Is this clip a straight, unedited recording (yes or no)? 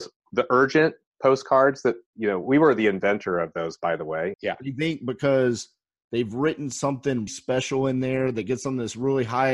no